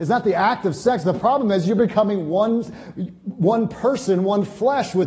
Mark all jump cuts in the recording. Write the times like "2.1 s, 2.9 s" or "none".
none